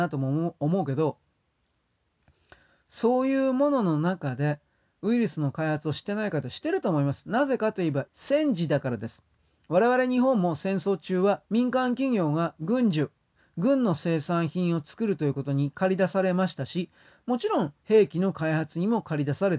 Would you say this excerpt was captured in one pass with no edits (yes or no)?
no